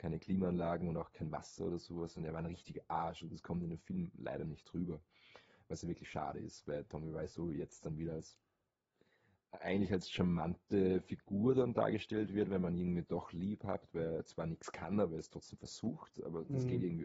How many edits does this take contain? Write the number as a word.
zero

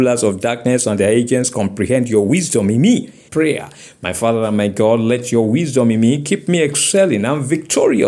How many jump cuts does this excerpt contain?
one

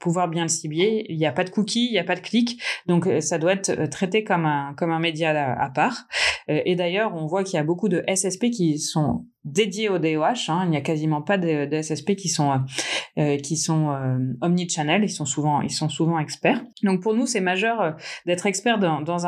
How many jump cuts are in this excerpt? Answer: one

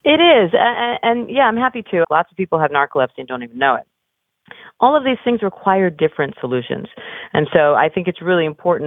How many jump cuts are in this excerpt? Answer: one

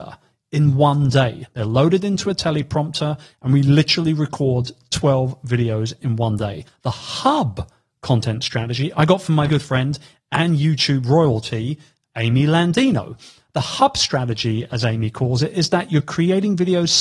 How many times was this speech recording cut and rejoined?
two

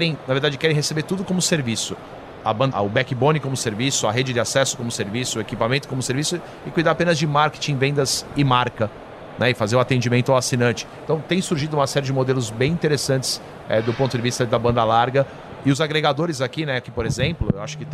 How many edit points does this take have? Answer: two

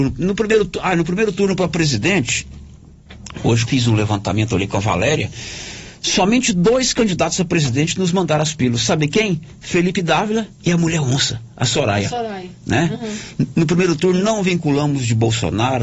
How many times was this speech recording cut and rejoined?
one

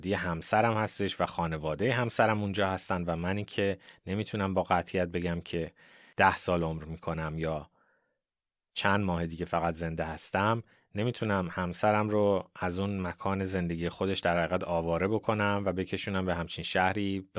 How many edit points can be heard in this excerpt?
zero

